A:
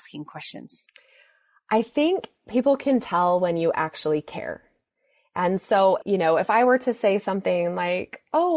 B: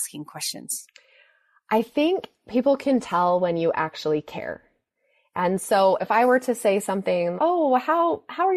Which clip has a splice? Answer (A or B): B